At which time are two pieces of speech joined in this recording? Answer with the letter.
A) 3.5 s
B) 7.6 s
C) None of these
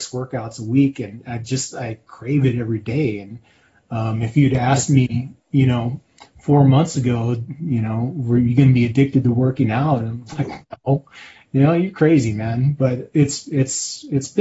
C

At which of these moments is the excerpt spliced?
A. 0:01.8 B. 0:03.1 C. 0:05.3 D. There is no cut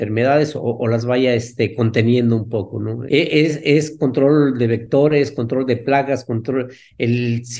B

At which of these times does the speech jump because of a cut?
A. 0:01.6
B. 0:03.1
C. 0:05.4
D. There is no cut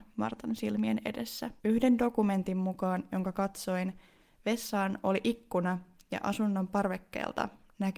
A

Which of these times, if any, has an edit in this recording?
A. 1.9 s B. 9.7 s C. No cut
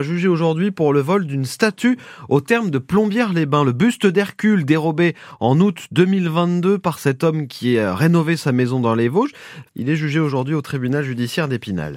B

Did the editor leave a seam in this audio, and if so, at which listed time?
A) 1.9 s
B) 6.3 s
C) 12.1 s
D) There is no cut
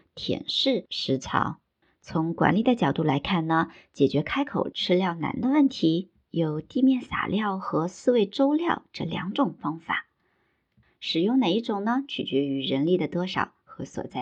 D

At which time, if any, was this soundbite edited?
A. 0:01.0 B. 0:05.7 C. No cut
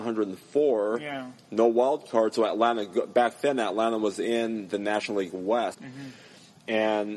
B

